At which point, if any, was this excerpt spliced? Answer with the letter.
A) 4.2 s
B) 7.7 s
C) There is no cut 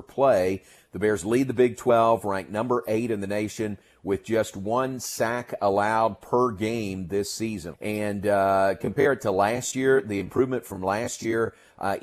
B